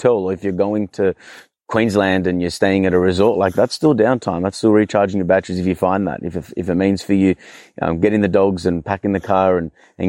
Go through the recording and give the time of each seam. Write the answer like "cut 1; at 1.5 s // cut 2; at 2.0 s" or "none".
none